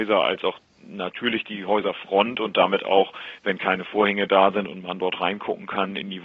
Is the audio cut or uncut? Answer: uncut